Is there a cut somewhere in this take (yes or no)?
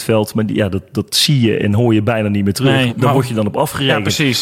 yes